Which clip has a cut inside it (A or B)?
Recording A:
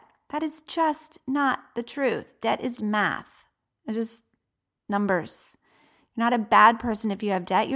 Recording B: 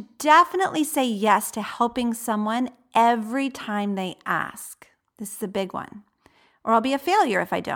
A